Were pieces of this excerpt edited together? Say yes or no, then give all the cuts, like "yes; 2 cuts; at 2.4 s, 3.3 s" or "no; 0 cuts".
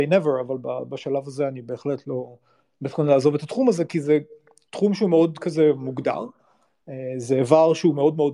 no; 0 cuts